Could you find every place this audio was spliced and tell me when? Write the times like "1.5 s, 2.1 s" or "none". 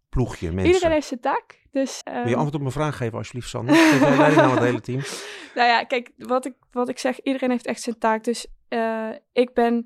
2.0 s